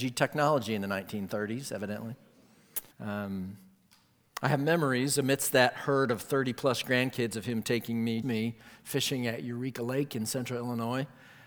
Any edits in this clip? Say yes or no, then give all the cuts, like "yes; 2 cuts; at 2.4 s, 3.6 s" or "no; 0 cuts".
yes; 2 cuts; at 2.9 s, 8.2 s